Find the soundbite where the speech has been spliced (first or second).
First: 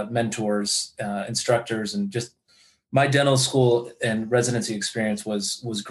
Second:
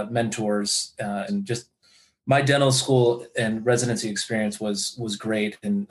second